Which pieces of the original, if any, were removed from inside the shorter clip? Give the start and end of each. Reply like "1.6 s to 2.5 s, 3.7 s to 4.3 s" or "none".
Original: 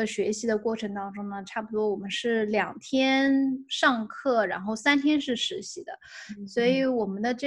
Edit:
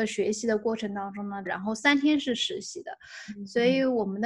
1.5 s to 4.5 s